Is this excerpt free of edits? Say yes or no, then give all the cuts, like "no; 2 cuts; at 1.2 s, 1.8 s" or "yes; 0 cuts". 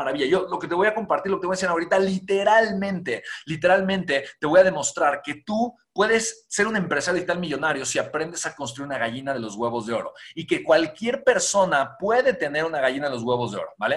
yes; 0 cuts